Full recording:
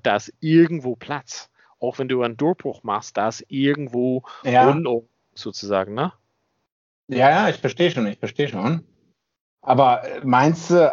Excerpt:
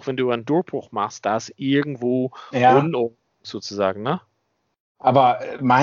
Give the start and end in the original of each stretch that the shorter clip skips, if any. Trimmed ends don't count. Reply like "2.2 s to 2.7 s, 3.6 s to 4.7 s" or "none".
6.9 s to 9.6 s